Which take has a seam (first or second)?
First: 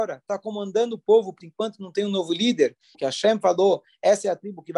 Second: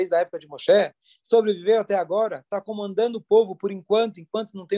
first